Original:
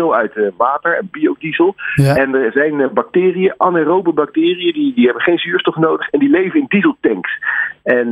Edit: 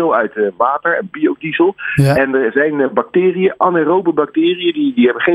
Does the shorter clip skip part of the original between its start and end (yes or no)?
no